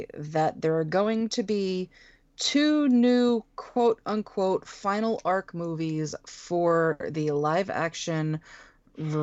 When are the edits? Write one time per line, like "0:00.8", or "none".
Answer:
none